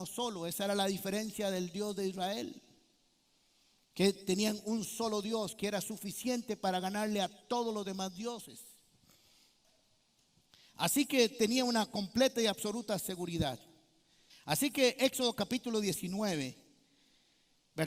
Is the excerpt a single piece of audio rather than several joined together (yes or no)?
no